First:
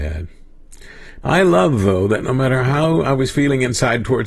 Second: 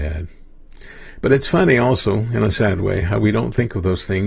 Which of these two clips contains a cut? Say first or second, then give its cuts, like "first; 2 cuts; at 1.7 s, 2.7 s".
first; 1 cut; at 1.2 s